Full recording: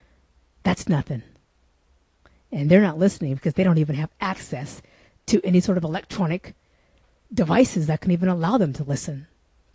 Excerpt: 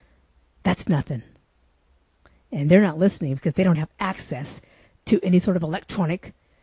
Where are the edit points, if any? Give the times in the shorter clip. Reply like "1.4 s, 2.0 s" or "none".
3.7 s